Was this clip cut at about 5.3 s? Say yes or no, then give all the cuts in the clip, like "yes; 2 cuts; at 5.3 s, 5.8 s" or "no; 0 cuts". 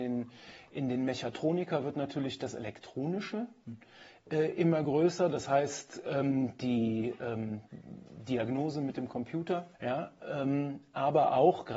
no; 1 cut; at 9.7 s